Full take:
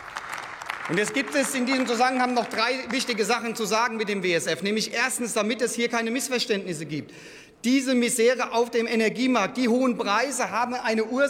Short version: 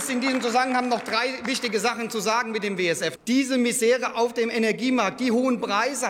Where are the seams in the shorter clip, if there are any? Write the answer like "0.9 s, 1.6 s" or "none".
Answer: 3.2 s